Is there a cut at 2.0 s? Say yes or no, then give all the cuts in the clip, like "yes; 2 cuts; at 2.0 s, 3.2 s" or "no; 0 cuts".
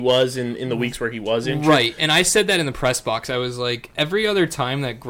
no; 0 cuts